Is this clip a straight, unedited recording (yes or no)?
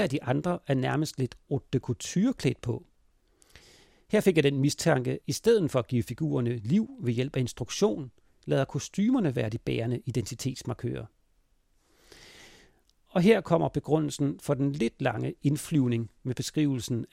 no